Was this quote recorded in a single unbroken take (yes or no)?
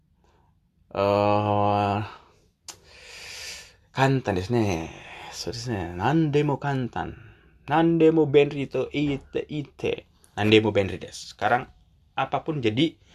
yes